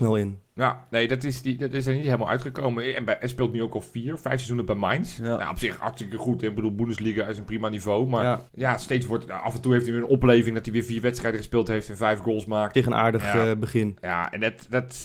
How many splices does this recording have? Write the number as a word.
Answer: two